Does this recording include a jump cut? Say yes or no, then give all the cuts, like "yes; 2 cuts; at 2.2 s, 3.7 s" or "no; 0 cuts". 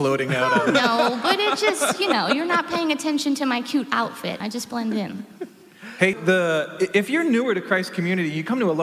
yes; 2 cuts; at 4.4 s, 6.1 s